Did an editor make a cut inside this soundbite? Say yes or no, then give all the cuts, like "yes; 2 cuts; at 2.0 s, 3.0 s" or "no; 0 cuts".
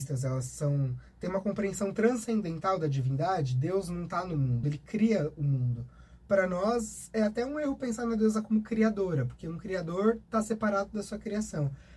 yes; 1 cut; at 4.6 s